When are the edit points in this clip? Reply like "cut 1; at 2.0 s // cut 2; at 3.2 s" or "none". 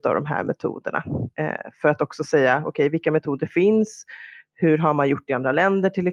none